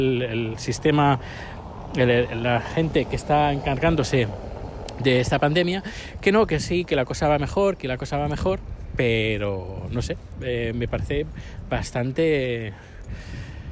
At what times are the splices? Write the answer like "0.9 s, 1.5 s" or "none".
none